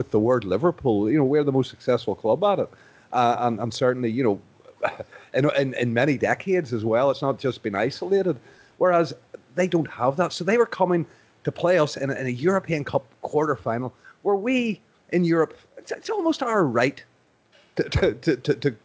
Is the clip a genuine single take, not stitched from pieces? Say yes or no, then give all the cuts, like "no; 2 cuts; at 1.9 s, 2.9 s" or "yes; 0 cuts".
yes; 0 cuts